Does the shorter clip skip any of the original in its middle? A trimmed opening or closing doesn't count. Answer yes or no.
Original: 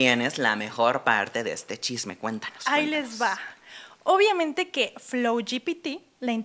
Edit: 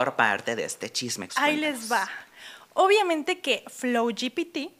yes